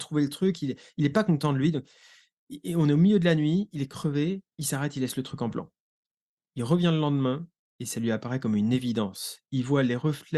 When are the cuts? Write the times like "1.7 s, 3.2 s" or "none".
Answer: 4.5 s